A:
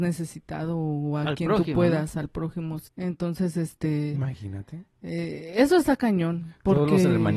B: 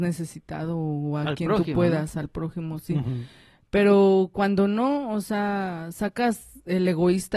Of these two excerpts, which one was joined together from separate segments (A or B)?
A